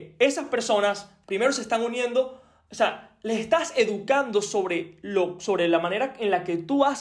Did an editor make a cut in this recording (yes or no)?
no